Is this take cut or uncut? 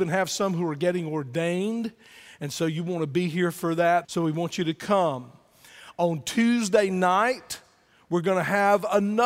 cut